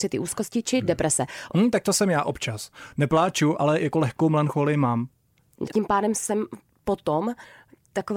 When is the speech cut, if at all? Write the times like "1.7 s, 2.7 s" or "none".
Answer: 1.5 s, 5.7 s

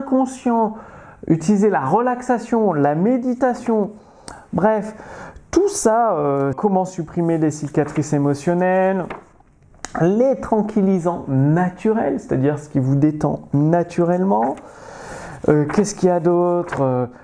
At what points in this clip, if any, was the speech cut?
6.5 s

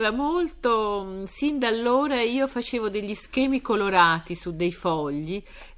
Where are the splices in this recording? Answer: none

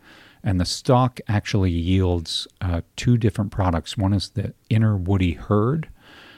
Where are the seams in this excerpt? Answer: none

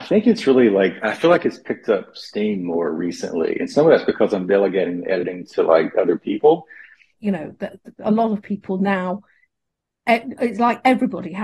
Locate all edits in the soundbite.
7.1 s

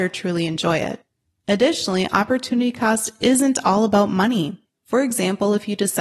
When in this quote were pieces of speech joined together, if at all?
4.7 s

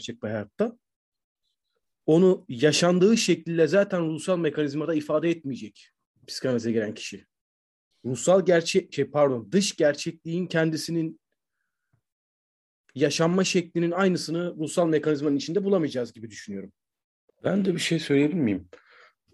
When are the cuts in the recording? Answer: 7.9 s, 17.3 s

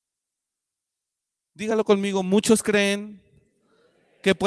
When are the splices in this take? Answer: none

